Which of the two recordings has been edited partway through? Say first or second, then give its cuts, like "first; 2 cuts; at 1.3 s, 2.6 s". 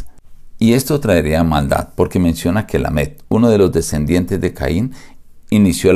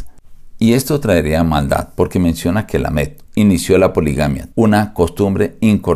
second; 2 cuts; at 3.3 s, 4.5 s